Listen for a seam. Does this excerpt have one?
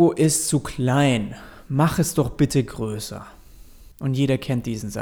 yes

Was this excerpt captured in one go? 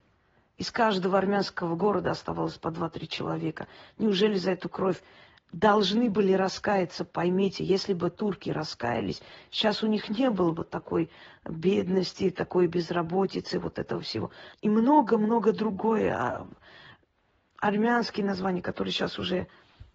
no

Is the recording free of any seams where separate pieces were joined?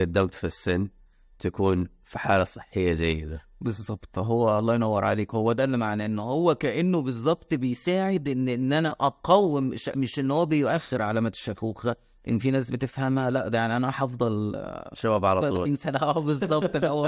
no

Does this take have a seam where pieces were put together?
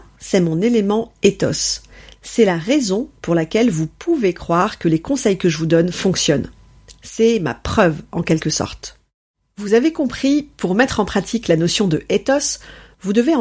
no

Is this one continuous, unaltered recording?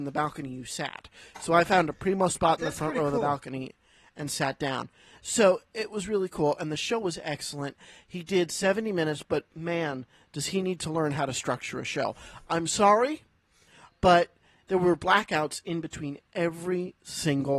yes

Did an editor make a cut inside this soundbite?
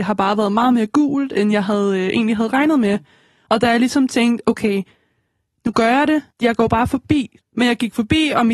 yes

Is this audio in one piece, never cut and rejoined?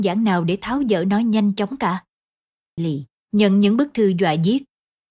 no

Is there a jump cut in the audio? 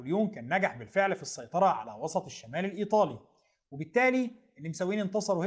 no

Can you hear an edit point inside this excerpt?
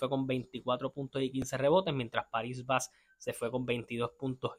no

